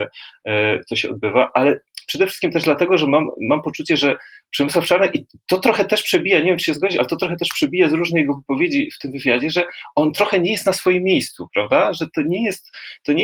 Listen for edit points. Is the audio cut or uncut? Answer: uncut